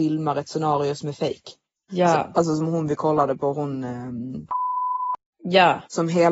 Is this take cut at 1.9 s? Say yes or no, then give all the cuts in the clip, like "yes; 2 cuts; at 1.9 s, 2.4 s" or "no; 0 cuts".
yes; 1 cut; at 1.9 s